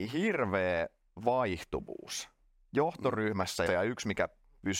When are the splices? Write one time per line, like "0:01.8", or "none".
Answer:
0:03.7